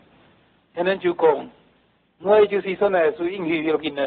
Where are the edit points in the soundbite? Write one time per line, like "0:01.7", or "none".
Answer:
none